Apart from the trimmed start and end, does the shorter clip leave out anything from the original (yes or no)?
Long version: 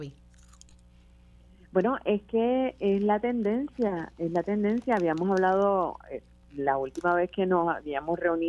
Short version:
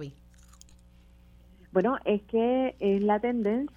no